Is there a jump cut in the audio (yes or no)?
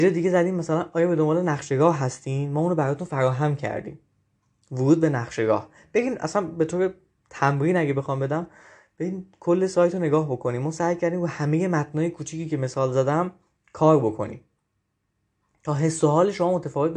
no